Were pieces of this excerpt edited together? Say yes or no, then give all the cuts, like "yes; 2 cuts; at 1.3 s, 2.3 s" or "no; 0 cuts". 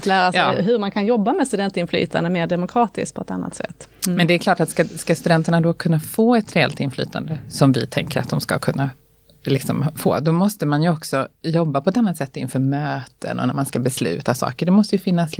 no; 0 cuts